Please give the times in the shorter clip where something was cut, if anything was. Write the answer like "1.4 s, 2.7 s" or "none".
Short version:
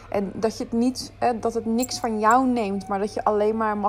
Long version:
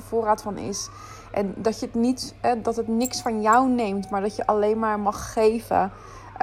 none